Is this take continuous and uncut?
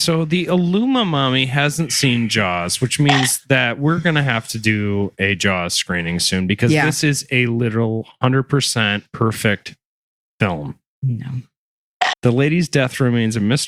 no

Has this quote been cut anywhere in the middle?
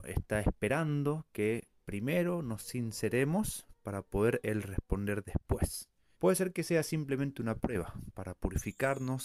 yes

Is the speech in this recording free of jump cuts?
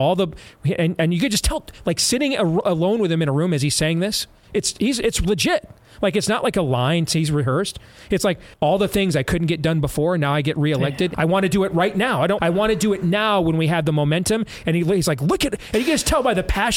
no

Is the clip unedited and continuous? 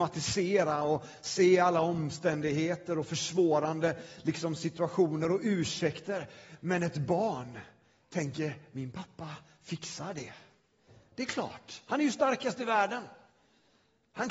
yes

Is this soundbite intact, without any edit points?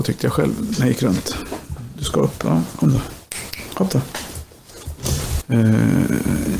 no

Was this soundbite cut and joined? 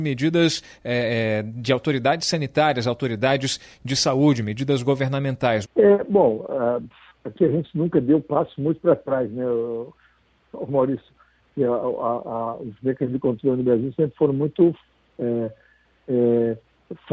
yes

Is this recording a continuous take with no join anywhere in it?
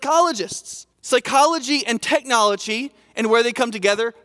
no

